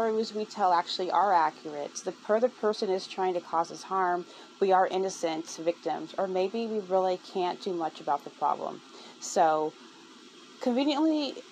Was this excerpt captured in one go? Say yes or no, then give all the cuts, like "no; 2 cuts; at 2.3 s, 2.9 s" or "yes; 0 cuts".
yes; 0 cuts